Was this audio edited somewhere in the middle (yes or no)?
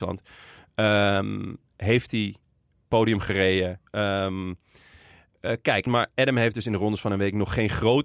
yes